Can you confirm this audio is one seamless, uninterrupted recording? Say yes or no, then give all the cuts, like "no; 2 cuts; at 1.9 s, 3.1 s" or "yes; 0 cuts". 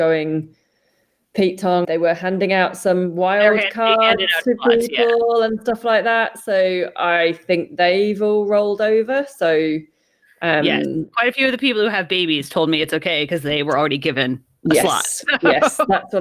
no; 1 cut; at 1.8 s